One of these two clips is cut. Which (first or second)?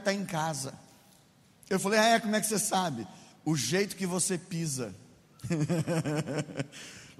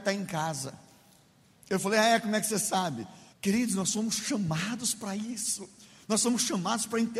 second